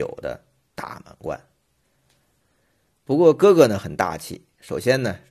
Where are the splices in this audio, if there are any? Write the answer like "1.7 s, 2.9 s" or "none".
2.4 s